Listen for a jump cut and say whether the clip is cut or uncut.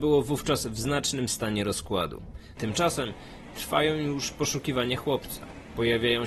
cut